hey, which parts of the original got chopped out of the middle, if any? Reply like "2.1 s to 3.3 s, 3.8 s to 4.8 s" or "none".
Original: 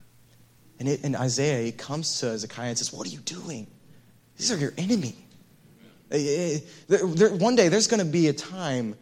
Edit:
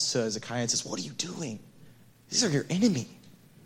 none